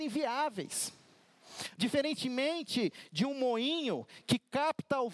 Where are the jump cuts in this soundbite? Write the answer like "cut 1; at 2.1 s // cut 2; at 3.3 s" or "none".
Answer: cut 1; at 1.8 s